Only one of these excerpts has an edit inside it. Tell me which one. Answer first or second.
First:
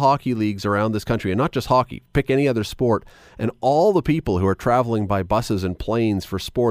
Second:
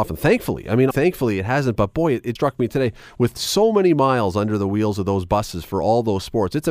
second